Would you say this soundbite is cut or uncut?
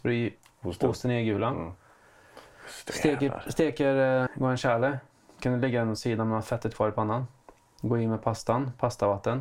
cut